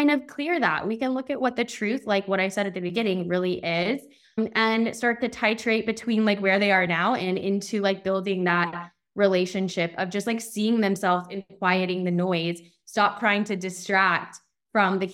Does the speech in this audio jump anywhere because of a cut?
no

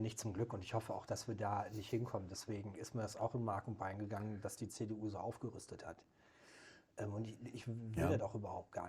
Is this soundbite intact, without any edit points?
yes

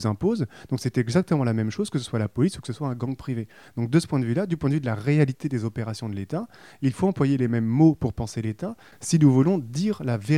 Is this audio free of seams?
yes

